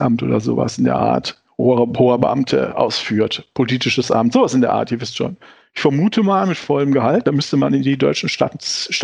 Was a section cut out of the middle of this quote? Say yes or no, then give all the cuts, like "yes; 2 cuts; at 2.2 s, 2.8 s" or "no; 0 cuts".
yes; 1 cut; at 7.2 s